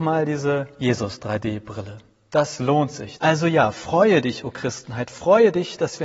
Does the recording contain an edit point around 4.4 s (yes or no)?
no